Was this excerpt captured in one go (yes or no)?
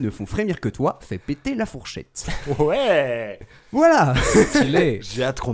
no